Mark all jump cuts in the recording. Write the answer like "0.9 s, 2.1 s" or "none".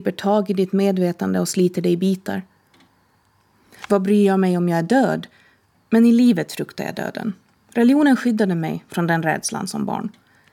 7.6 s